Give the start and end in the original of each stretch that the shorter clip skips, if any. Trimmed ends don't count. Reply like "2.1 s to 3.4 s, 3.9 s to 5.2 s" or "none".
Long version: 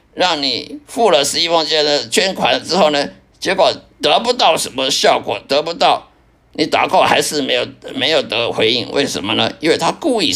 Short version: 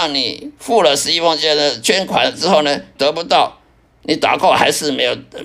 3.2 s to 5.5 s